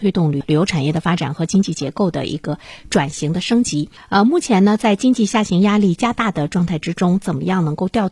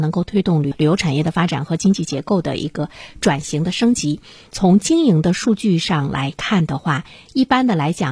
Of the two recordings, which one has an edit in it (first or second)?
first